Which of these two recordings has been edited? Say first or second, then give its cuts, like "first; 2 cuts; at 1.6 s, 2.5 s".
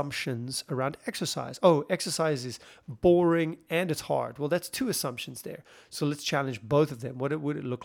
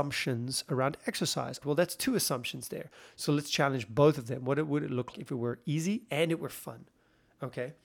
second; 2 cuts; at 1.6 s, 5.1 s